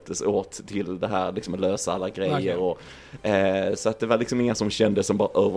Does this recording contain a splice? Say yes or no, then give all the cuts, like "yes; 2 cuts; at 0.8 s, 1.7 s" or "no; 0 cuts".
no; 0 cuts